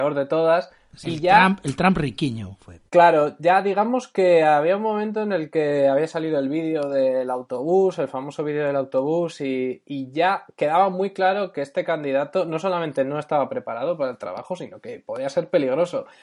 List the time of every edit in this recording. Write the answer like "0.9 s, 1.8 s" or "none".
1.0 s, 2.9 s

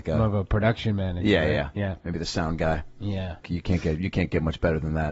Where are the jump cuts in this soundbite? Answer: 2.0 s, 3.4 s

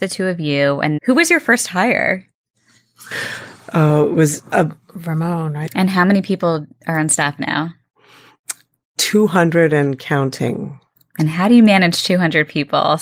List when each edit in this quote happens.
1.0 s, 5.7 s

